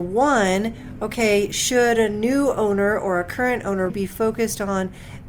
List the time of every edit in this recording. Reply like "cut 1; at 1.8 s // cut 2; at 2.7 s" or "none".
cut 1; at 3.9 s

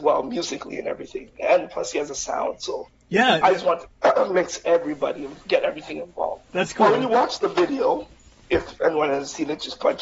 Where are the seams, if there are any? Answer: cut 1; at 6.5 s

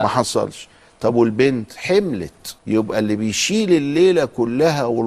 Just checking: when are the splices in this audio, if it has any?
cut 1; at 2.6 s

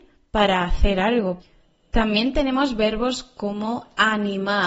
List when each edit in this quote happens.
none

